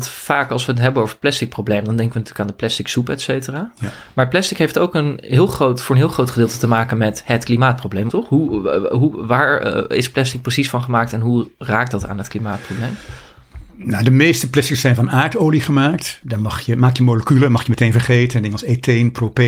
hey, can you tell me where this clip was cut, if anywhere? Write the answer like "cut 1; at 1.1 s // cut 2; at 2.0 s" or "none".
cut 1; at 8.1 s // cut 2; at 16.2 s